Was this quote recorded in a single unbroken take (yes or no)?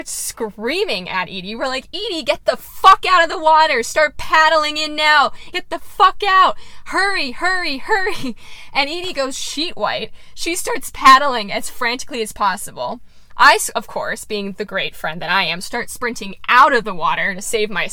no